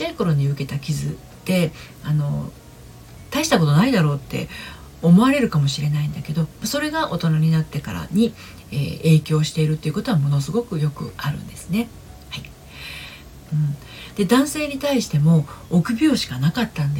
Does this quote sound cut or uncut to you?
cut